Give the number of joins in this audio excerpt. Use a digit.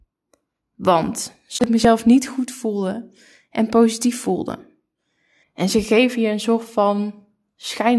1